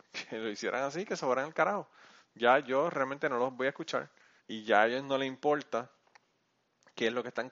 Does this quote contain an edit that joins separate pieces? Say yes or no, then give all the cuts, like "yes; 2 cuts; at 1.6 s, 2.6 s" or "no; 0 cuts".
yes; 1 cut; at 4.4 s